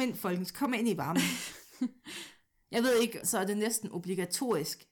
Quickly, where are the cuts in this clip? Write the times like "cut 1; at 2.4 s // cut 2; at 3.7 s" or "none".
cut 1; at 3.2 s